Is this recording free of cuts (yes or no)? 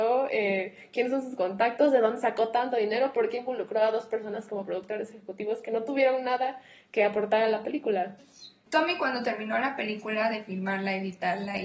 no